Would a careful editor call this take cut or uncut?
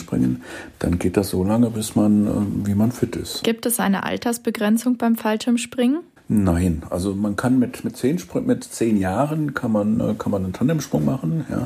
cut